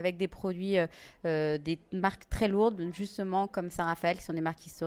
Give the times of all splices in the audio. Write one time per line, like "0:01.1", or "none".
none